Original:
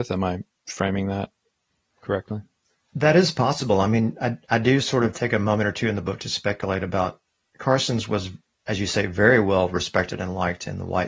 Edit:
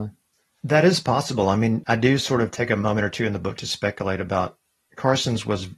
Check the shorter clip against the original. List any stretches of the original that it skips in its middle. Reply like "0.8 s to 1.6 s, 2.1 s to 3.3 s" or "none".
4.1 s to 4.5 s